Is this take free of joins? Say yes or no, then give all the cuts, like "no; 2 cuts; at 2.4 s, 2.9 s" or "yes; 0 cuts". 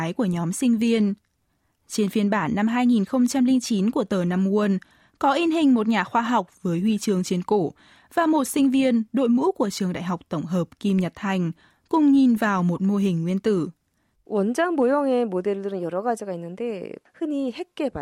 no; 1 cut; at 14.1 s